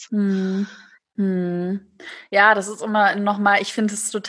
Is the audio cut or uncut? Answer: cut